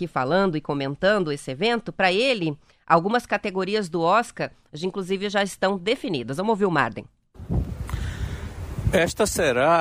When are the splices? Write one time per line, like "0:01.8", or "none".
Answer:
none